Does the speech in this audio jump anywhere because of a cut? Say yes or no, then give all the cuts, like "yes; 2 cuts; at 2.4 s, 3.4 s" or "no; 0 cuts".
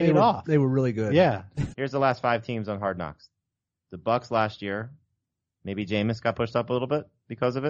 yes; 1 cut; at 1.7 s